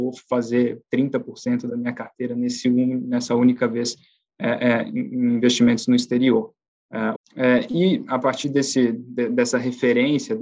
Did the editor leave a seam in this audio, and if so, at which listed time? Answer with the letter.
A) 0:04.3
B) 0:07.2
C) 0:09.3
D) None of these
B